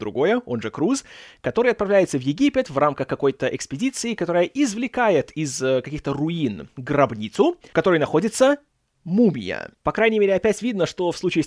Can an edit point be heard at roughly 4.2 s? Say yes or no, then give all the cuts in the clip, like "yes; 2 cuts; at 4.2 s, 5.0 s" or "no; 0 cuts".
no; 1 cut; at 9.8 s